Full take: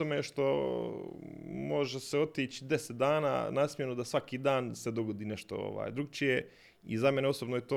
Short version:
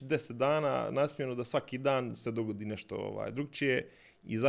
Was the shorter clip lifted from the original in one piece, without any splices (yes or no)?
yes